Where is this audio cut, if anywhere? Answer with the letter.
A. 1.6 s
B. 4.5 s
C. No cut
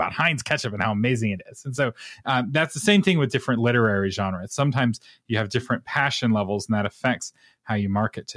C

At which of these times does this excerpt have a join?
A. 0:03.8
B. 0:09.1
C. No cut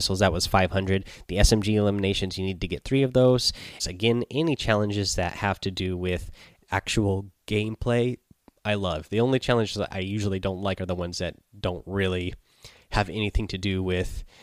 A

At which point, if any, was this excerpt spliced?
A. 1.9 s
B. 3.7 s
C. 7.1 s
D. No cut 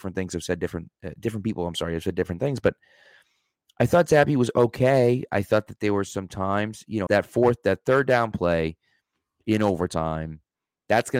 C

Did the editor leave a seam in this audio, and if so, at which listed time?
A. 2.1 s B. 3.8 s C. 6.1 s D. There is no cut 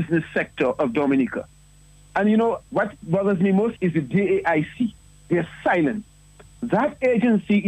D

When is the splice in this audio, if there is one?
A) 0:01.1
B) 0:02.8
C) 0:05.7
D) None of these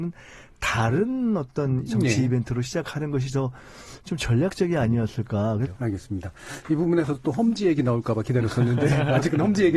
C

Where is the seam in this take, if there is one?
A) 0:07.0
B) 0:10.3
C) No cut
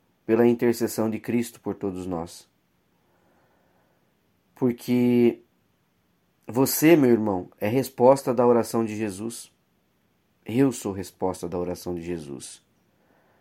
C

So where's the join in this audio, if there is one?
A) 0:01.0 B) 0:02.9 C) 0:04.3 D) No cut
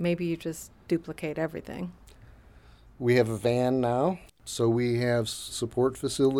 C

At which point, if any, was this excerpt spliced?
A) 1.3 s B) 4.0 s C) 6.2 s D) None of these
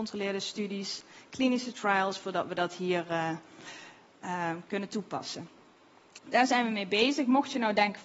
D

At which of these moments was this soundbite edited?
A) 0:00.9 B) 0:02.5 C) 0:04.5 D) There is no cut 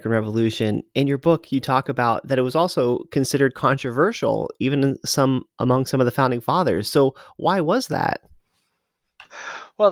D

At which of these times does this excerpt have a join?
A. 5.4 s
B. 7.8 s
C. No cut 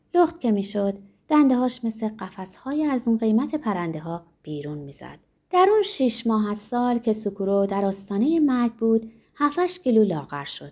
A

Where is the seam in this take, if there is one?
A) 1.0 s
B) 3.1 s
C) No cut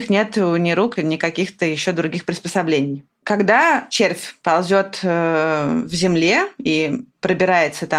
A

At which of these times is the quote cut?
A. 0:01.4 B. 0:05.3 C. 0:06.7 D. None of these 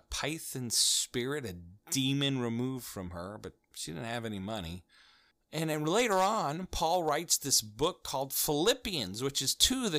B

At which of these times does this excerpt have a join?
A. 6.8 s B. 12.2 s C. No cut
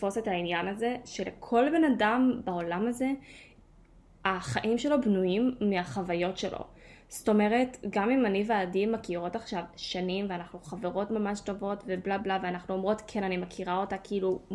B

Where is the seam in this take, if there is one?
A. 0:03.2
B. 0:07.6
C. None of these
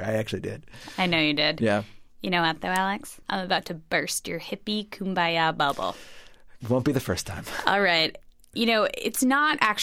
A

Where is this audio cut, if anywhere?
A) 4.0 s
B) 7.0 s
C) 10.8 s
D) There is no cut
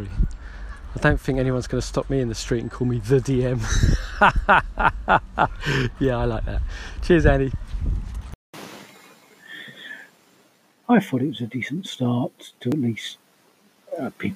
C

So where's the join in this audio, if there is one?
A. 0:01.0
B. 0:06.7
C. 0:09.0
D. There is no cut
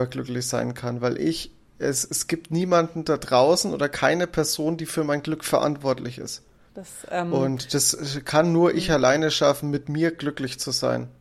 B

